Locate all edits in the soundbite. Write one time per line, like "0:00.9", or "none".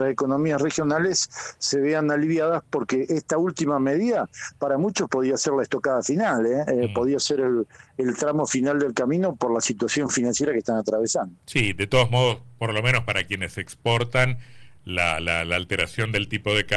0:11.4